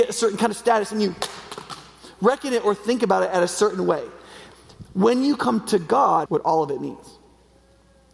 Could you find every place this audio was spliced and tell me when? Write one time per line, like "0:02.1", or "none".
0:06.3